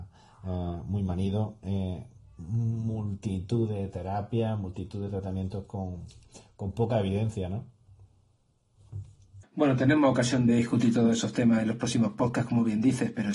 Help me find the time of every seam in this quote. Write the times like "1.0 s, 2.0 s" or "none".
9.4 s, 10.5 s

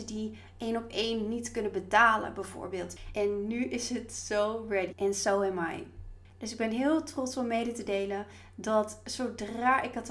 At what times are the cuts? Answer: 3.1 s, 4.9 s

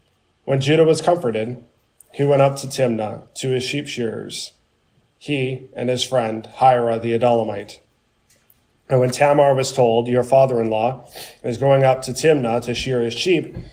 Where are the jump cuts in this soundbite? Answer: none

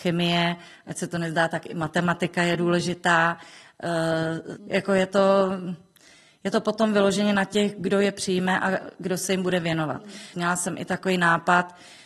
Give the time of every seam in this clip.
4.6 s, 10.3 s

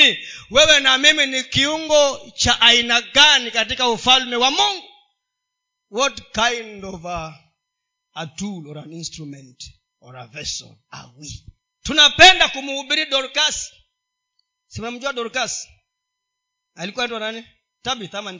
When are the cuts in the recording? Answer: none

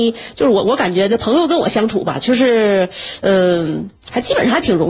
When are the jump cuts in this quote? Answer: none

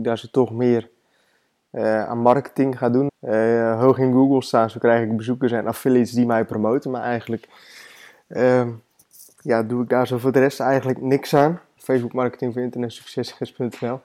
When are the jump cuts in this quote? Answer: 3.1 s, 11.8 s

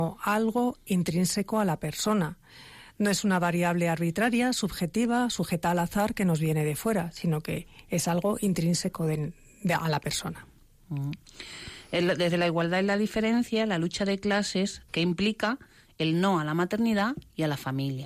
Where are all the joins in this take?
14.9 s

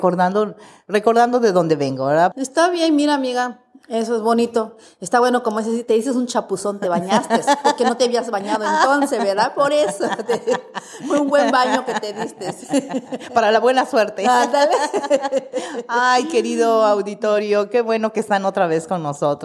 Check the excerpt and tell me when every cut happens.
2.3 s

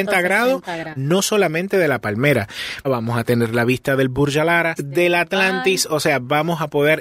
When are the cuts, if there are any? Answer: 1.0 s, 2.8 s, 4.8 s

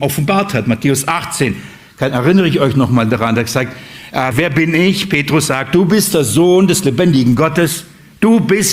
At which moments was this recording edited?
4.3 s

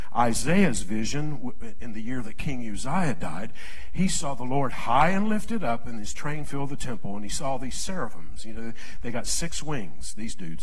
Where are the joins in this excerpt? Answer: none

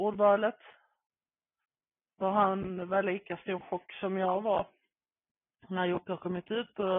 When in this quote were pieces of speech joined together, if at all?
5.6 s

